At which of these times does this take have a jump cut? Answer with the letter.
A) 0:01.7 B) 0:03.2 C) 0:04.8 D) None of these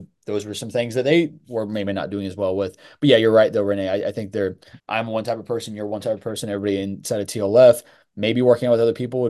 C